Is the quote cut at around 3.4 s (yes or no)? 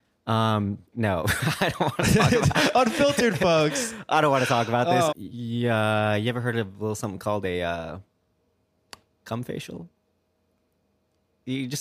no